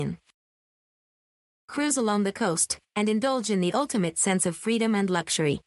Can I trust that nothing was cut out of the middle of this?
no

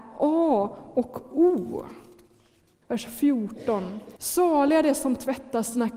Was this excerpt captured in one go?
no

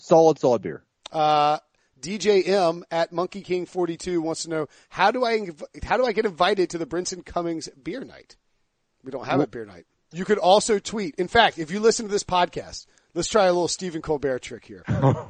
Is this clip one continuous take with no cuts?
no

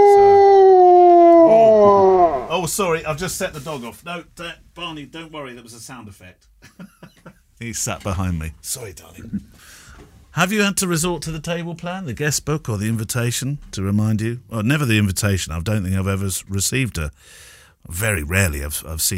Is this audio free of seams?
yes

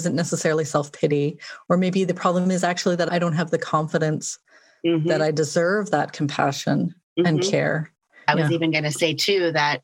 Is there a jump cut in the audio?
no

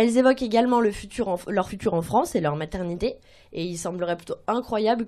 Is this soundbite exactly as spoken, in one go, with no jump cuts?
no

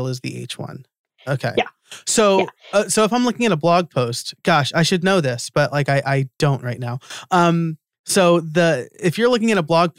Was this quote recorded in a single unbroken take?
yes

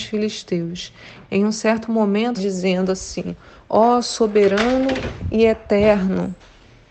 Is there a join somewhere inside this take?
yes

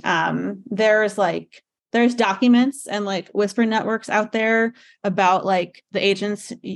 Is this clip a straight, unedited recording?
yes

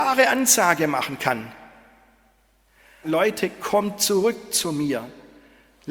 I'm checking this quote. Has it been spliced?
yes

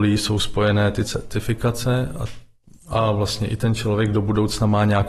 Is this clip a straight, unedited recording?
yes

